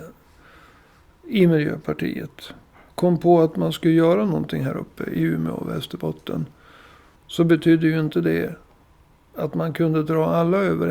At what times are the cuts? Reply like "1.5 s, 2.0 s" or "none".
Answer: 7.2 s